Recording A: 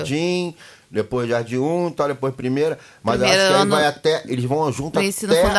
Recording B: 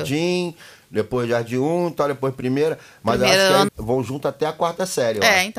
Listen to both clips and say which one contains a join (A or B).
B